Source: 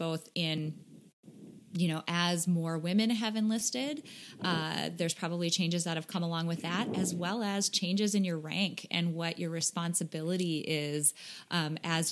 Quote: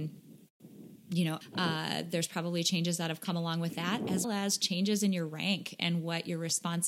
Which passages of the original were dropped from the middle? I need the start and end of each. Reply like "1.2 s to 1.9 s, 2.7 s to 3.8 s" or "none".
2.0 s to 4.3 s, 7.1 s to 7.4 s